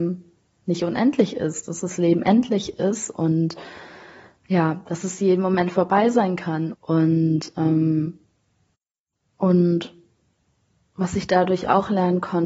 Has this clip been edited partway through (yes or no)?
yes